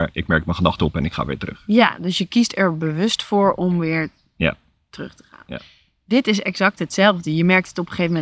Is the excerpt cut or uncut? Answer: uncut